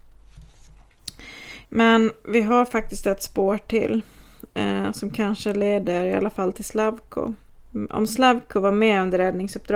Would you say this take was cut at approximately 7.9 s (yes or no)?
no